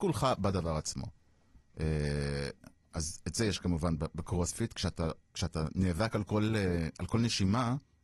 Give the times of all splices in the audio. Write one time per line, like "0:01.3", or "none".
none